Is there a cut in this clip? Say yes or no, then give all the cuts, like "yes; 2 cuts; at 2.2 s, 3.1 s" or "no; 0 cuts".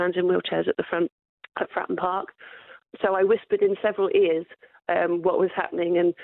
no; 0 cuts